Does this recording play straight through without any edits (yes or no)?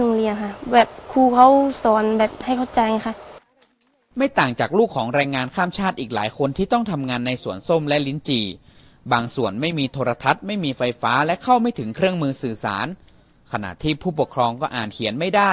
yes